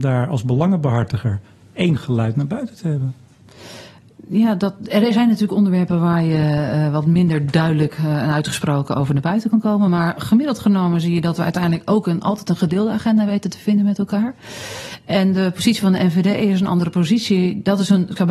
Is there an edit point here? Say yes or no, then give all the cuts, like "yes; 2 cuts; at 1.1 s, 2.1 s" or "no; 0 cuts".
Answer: no; 0 cuts